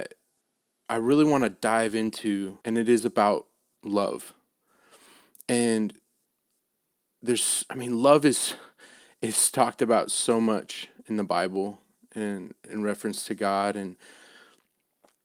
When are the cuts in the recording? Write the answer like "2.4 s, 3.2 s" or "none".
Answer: 2.6 s